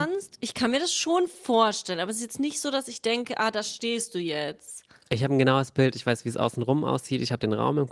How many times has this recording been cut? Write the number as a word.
zero